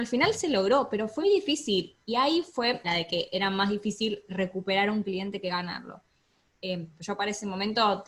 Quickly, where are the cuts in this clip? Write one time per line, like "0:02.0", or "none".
0:01.2
0:02.8